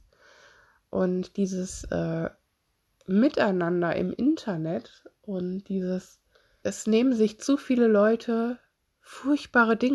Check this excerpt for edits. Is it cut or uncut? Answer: cut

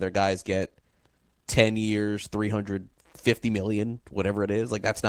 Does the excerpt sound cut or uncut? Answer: uncut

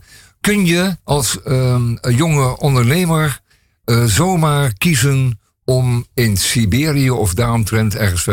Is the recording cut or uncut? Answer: cut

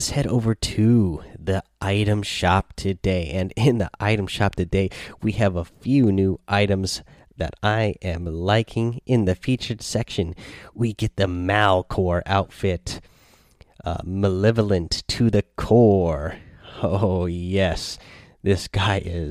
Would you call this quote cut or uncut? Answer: uncut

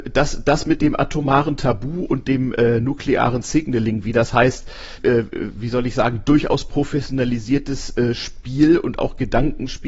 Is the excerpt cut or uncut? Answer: cut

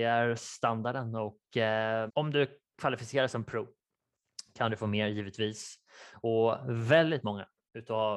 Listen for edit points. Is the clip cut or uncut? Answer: cut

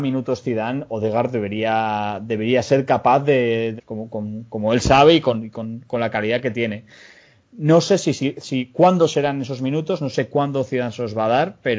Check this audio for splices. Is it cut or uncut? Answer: cut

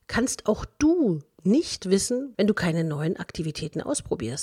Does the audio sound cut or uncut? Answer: cut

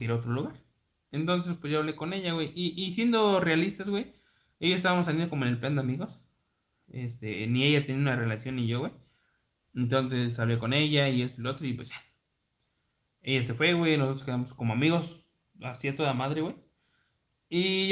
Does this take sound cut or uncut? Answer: uncut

